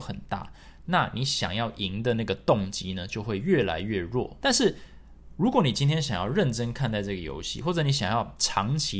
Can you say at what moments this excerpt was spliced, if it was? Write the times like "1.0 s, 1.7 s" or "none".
4.4 s